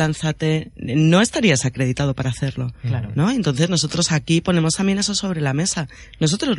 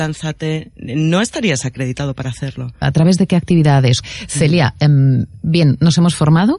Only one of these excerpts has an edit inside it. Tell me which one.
second; 2 cuts; at 2.8 s, 4.0 s

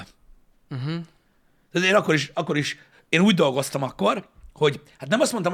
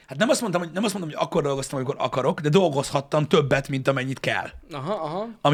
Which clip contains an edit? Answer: first; 1 cut; at 2.9 s

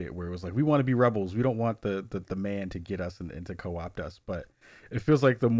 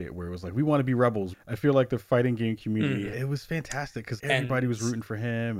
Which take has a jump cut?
second; 3 cuts; at 1.3 s, 3.1 s, 4.2 s

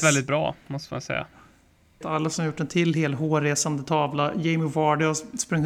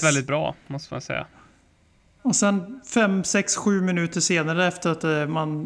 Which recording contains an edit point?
first; 1 cut; at 2.0 s

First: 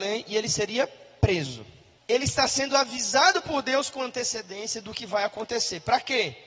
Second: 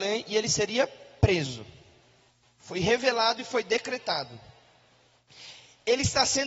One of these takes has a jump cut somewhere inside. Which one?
first; 1 cut; at 2.0 s

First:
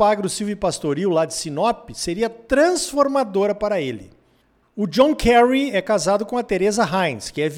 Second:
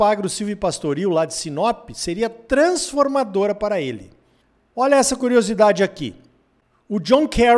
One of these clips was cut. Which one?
first; 1 cut; at 4.6 s

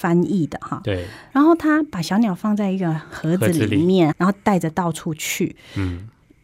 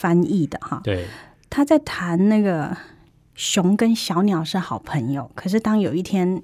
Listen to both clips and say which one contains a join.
first; 2 cuts; at 1.3 s, 4.1 s

